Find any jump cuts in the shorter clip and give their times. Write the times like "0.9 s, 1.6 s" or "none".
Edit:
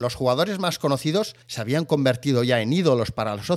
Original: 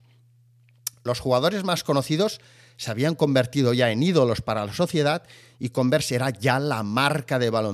1.4 s